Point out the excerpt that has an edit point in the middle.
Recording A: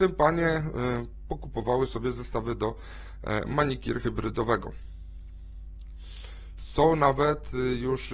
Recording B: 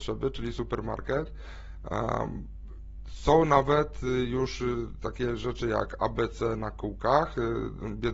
A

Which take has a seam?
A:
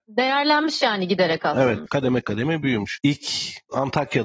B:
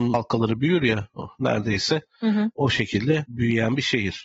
A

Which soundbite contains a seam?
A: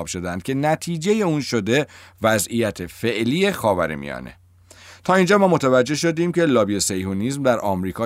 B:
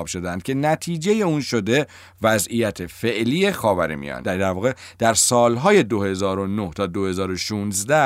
B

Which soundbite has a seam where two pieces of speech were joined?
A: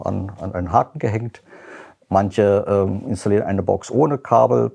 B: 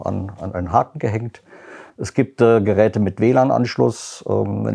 B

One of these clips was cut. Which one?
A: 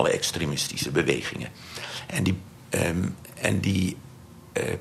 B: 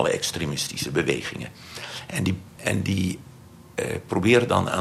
B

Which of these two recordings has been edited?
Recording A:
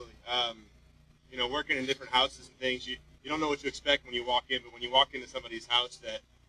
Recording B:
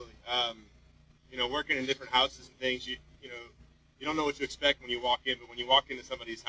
A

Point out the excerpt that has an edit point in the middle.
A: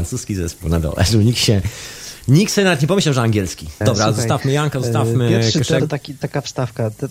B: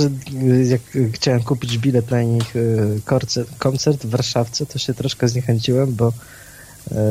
A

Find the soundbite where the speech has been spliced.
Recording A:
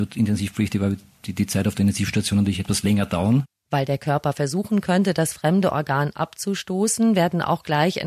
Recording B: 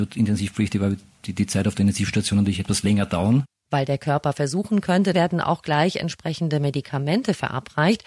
B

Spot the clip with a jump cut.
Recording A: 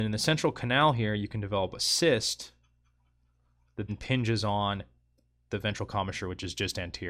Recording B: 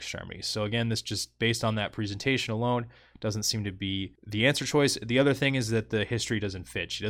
A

